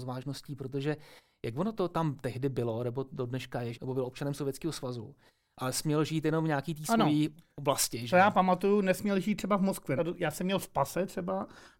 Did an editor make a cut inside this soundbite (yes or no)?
yes